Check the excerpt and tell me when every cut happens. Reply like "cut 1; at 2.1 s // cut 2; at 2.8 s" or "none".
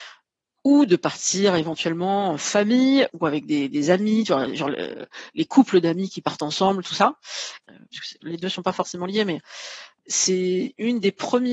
cut 1; at 7.6 s